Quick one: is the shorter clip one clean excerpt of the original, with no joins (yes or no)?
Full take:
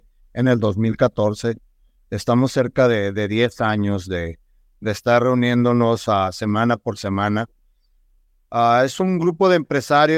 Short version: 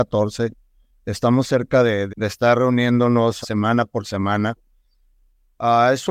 no